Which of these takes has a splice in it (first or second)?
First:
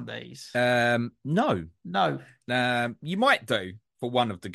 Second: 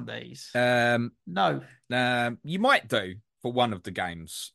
second